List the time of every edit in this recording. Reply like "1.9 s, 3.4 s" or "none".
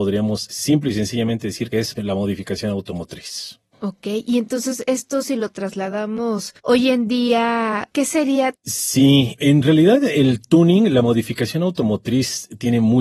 6.6 s, 8.6 s